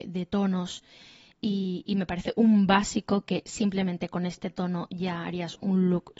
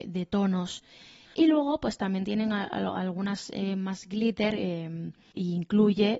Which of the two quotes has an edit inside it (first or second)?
second